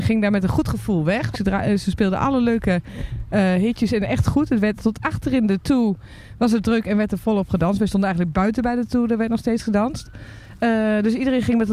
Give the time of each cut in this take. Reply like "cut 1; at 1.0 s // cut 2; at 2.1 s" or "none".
cut 1; at 1.3 s